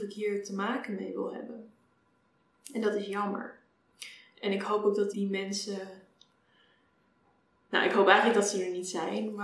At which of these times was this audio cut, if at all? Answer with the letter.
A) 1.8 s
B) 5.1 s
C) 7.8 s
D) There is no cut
B